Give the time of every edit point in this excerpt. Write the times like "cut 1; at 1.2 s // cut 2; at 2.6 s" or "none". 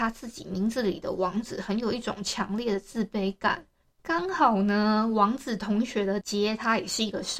cut 1; at 6.2 s